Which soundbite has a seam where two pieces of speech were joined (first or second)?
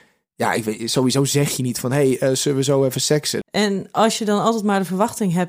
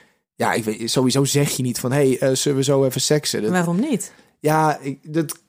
first